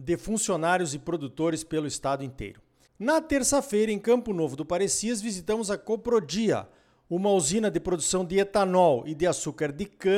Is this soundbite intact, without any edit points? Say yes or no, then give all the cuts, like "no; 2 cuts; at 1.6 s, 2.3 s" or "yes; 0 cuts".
yes; 0 cuts